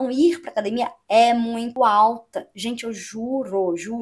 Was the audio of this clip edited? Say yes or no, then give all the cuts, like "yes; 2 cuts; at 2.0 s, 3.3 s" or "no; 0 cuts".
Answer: no; 0 cuts